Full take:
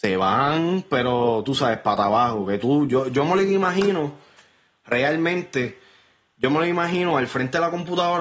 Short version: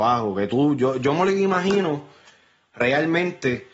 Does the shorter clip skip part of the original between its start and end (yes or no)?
no